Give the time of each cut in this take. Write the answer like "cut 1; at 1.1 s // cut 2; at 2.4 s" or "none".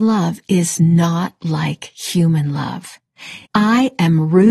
cut 1; at 3.5 s